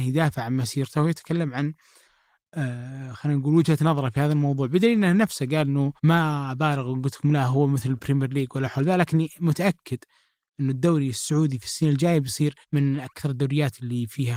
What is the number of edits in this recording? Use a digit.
2